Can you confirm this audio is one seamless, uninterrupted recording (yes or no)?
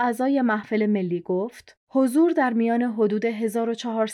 yes